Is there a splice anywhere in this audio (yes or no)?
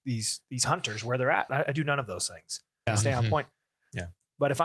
yes